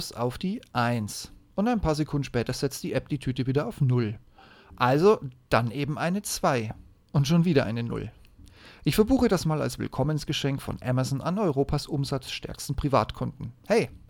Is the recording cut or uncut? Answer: uncut